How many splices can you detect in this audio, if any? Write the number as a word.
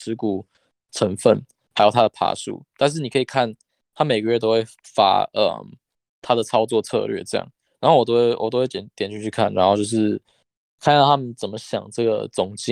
zero